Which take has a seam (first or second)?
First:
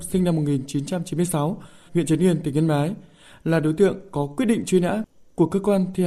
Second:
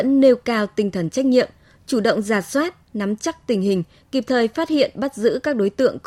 first